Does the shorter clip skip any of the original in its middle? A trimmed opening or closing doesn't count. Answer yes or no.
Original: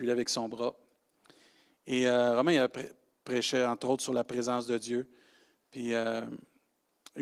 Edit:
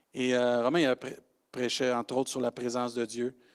no